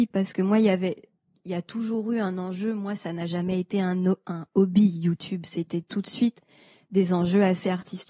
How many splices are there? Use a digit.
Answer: 0